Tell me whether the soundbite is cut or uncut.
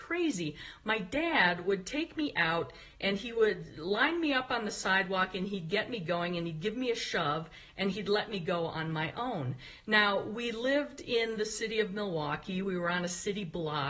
uncut